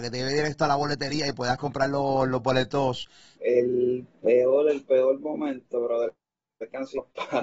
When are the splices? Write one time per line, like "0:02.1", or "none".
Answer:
0:03.4